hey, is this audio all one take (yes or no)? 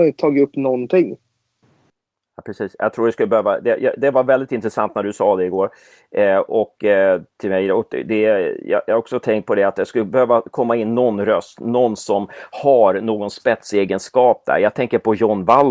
yes